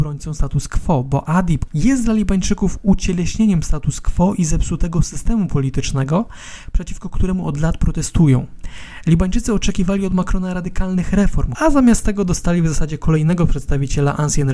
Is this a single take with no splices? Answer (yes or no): no